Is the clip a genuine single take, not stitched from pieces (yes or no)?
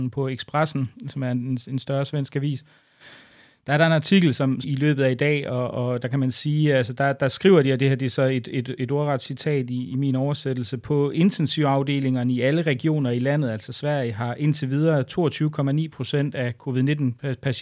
no